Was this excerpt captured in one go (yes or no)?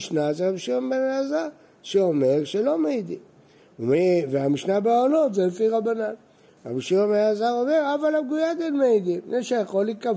no